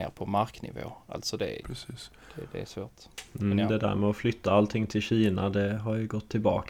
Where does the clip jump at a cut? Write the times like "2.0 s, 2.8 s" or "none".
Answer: 1.6 s